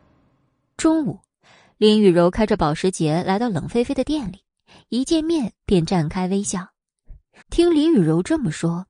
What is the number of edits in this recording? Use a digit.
1